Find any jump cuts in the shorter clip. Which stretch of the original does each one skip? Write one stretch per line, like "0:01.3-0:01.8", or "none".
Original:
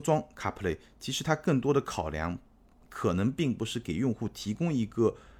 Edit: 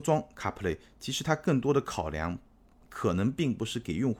none